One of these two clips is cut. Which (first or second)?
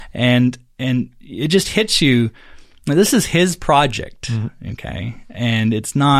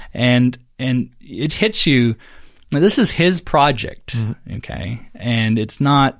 second